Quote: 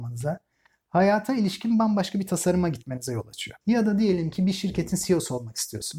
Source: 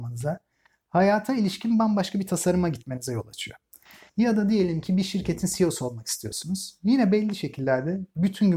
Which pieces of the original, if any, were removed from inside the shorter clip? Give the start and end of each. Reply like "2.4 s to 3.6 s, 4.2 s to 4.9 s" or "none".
3.6 s to 4.1 s